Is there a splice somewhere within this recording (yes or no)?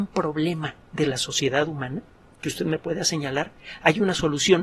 no